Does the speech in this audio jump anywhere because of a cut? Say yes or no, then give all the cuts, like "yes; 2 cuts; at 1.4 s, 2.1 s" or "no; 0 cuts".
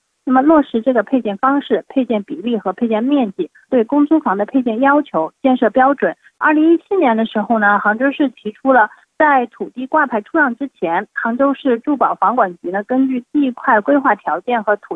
yes; 3 cuts; at 3.7 s, 6.3 s, 9.0 s